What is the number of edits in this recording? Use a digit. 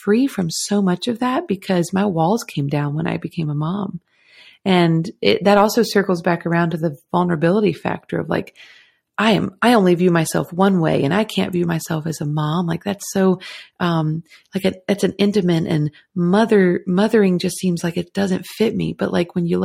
0